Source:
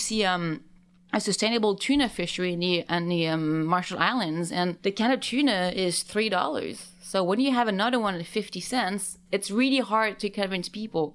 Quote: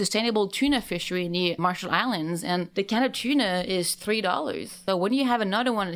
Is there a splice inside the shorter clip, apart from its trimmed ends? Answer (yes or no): yes